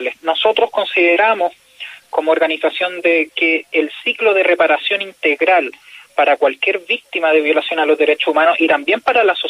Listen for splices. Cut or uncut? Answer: cut